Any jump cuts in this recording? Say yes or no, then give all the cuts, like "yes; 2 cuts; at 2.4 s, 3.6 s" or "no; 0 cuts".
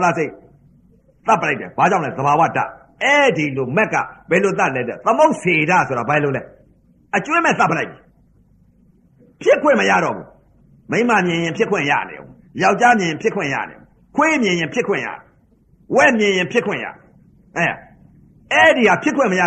no; 0 cuts